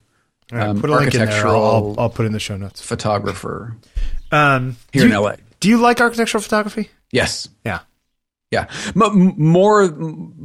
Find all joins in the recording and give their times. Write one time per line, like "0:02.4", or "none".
none